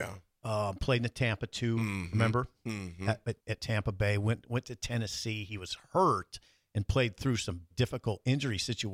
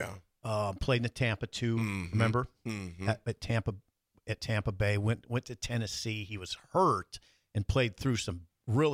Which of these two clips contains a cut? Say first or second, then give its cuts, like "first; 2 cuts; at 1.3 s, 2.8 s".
first; 2 cuts; at 3.4 s, 7.7 s